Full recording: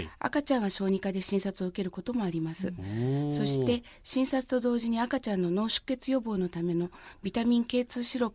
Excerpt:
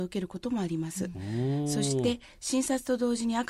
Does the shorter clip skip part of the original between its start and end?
no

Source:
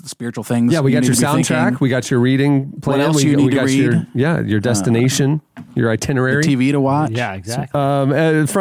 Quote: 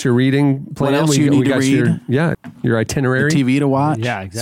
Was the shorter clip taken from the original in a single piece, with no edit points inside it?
no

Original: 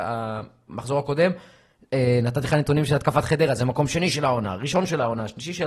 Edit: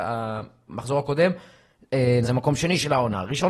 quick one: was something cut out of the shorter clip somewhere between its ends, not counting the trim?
yes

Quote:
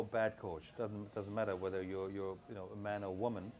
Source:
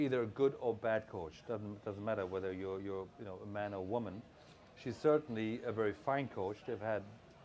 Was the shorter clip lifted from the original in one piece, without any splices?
yes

